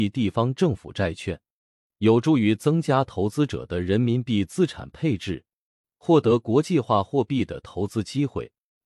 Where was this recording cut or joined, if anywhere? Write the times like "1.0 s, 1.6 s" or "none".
none